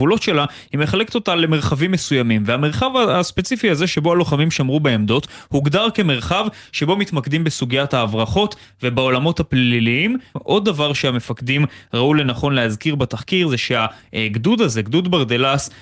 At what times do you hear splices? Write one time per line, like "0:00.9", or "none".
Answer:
0:10.4